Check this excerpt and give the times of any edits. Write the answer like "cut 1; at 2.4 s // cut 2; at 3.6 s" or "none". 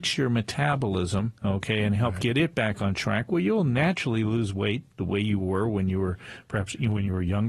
cut 1; at 1.4 s